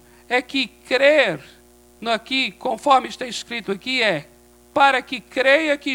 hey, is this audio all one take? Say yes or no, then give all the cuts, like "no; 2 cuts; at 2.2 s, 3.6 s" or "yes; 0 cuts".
yes; 0 cuts